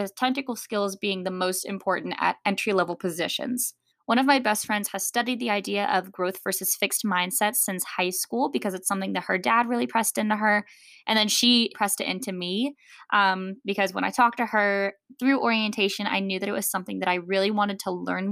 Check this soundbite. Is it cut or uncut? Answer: cut